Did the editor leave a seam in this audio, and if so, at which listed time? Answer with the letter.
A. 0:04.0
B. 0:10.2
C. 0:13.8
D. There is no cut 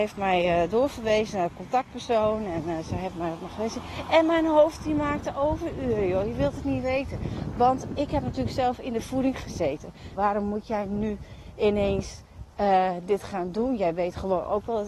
B